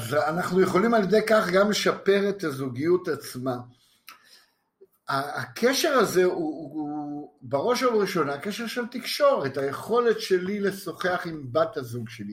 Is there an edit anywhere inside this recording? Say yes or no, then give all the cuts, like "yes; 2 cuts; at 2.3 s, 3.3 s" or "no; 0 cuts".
no; 0 cuts